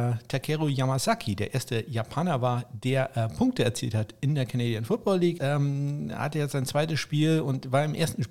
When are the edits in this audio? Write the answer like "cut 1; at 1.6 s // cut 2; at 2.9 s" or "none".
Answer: cut 1; at 5.4 s